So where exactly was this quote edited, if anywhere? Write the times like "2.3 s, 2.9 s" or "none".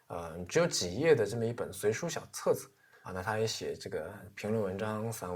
3.0 s